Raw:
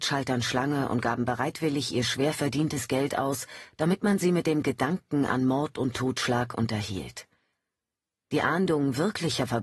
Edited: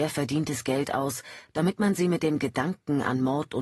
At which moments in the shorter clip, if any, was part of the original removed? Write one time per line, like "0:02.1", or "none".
none